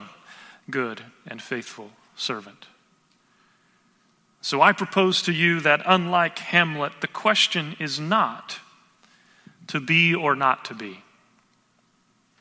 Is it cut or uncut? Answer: uncut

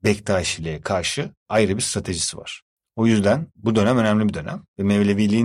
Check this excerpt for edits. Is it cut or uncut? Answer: uncut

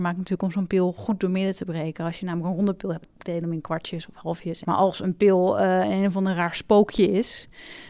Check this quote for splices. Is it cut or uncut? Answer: cut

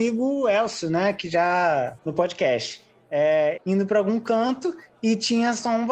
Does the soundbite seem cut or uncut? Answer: cut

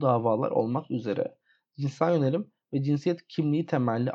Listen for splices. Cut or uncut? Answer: uncut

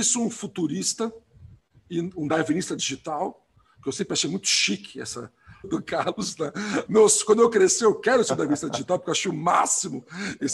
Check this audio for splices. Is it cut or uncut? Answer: cut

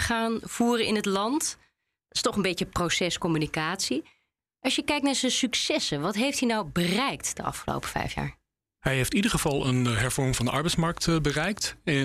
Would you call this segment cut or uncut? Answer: uncut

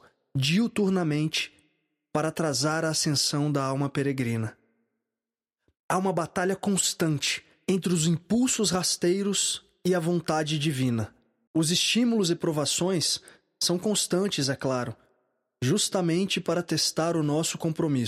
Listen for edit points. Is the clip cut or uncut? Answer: cut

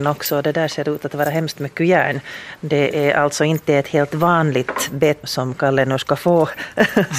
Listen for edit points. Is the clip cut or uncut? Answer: cut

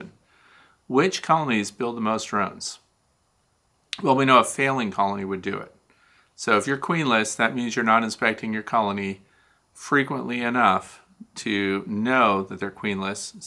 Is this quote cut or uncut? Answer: uncut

